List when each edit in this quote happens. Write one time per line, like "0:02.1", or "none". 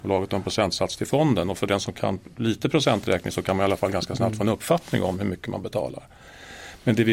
none